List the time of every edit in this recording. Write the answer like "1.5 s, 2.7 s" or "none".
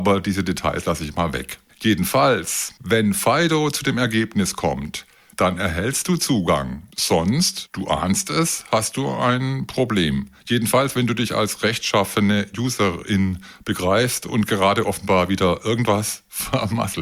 5.3 s